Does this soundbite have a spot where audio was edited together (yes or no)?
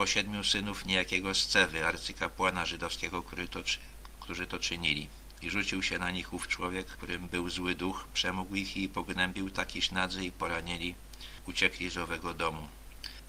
yes